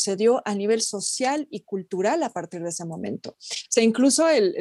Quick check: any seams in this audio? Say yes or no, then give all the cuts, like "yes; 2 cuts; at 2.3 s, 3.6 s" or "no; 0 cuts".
no; 0 cuts